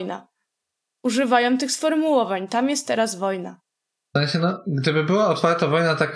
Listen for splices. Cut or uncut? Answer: uncut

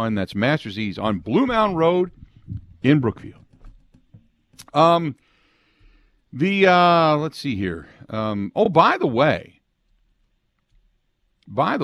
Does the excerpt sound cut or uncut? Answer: uncut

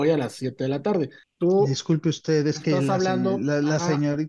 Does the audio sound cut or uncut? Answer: cut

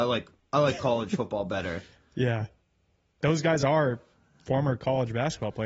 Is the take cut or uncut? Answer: cut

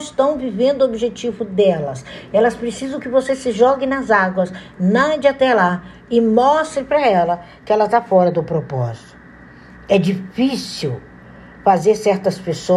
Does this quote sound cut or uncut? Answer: uncut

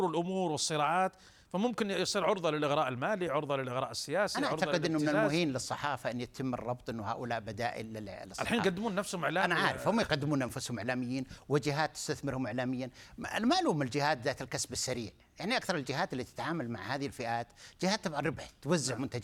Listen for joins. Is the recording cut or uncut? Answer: uncut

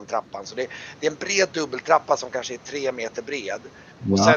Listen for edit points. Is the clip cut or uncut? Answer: uncut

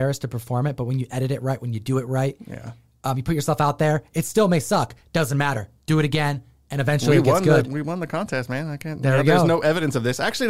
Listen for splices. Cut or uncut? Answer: uncut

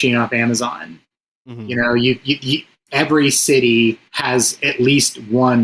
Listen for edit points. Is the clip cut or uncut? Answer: uncut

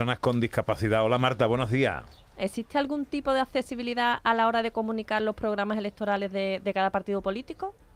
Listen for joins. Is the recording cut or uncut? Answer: cut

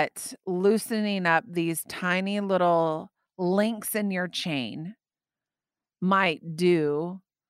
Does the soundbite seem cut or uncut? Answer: uncut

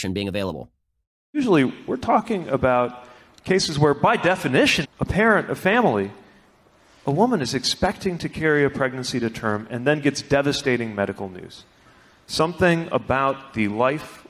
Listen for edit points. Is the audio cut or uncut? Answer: cut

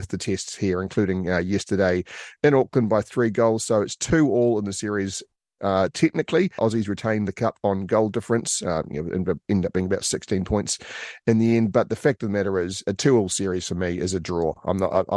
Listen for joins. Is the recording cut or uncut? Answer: cut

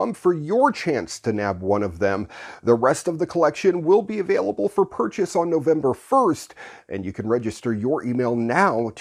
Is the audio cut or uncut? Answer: uncut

